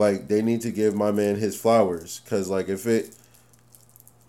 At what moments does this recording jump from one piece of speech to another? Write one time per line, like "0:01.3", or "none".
none